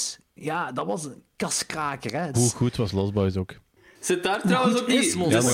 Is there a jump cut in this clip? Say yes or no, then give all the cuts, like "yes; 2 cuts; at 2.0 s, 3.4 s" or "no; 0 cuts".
yes; 1 cut; at 2.3 s